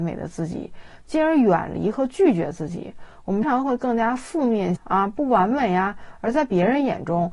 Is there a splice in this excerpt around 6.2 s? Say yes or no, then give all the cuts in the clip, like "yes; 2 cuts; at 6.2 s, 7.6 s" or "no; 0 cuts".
no; 2 cuts; at 3.4 s, 4.8 s